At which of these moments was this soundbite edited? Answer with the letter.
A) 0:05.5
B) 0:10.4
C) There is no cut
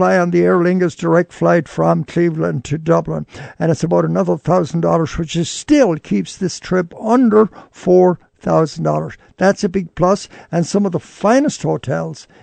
C